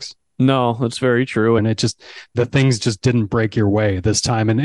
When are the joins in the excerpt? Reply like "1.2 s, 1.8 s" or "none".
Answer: 1.6 s